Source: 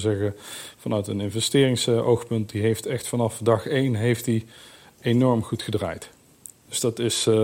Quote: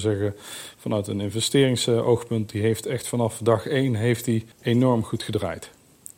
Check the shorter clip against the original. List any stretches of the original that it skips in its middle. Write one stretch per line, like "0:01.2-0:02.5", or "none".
0:04.5-0:04.9